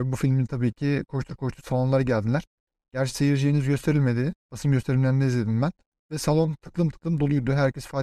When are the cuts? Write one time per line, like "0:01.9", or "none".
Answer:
none